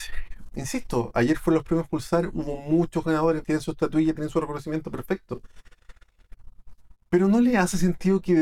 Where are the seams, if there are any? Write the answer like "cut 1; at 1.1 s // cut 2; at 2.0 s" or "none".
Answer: cut 1; at 3.4 s